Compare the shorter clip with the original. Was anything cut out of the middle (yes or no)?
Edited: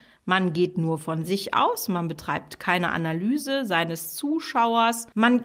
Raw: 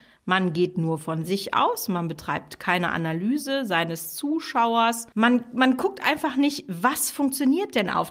no